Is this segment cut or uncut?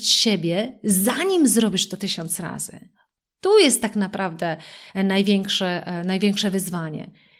uncut